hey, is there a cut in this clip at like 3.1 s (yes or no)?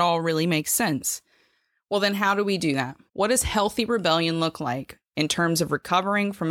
yes